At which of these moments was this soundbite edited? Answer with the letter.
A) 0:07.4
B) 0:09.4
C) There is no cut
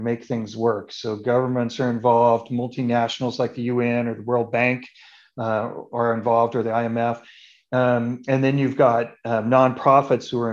C